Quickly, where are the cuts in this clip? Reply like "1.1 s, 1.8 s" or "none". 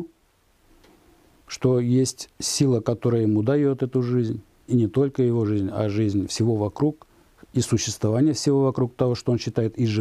4.7 s

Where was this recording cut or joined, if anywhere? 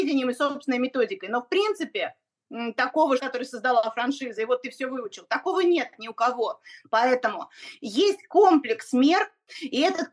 3.2 s, 6.8 s

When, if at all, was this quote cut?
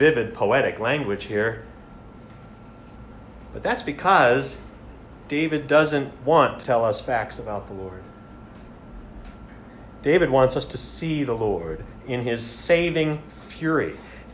6.6 s

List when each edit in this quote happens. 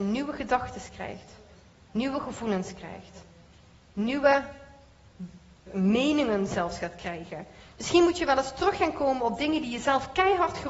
5.7 s

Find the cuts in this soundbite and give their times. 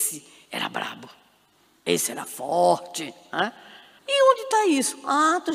4.0 s

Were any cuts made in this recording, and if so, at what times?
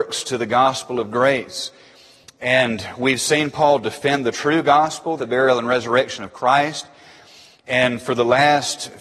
5.2 s

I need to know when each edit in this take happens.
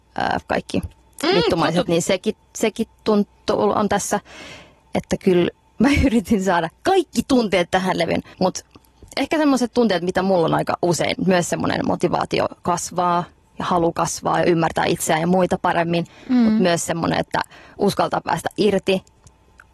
1.9 s, 8.3 s, 11.1 s

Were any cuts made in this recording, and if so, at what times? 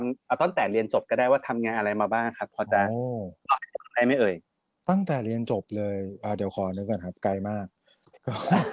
none

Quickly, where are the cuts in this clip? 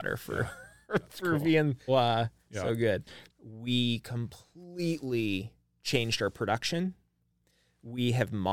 1.9 s, 3.3 s

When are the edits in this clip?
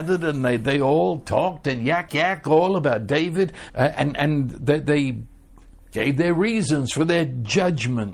2.1 s, 3.7 s

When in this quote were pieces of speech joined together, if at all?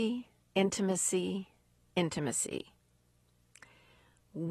none

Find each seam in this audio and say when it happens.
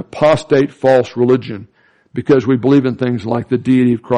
none

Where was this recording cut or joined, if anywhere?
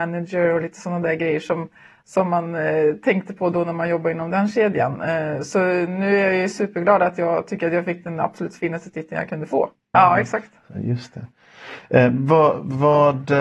9.9 s

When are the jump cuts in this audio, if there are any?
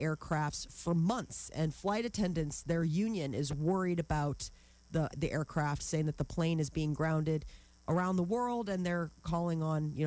5.1 s

